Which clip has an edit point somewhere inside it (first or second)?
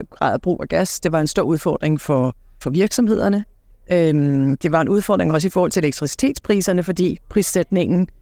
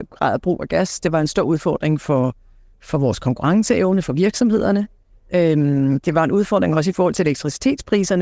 first